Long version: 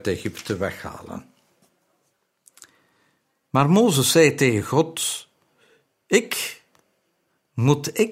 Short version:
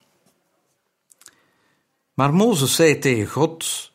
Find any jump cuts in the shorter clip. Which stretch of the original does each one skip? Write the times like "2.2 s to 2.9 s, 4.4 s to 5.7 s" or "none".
none